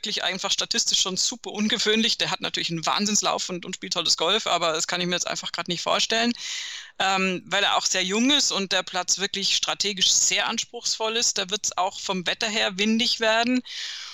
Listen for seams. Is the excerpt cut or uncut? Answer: uncut